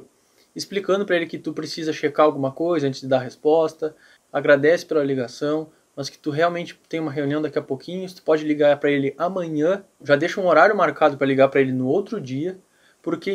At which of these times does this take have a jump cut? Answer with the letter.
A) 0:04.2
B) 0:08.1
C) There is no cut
A